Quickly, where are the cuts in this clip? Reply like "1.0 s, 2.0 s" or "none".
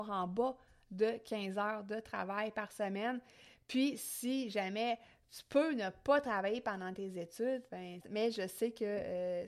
8.0 s